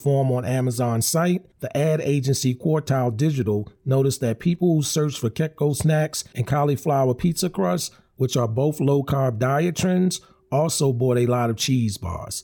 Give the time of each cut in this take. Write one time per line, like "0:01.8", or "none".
none